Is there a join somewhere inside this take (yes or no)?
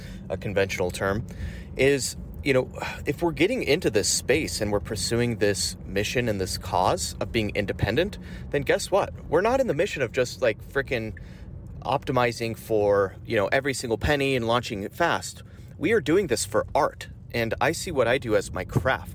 no